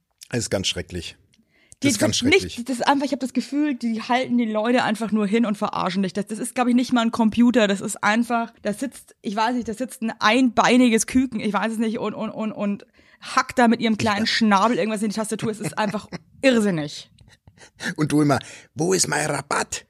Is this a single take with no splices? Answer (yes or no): no